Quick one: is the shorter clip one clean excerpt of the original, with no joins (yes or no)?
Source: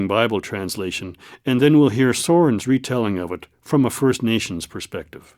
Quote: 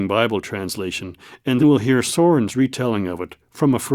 no